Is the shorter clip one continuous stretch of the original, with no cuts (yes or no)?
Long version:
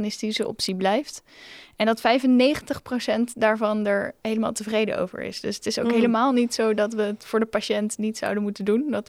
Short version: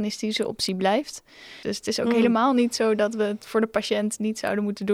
no